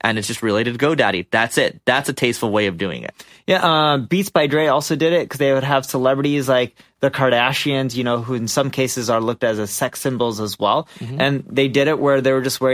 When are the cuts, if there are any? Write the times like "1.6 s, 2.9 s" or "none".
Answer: none